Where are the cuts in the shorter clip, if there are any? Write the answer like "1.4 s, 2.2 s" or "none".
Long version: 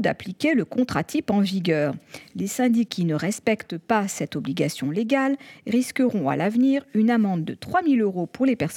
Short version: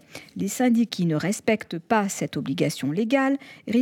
none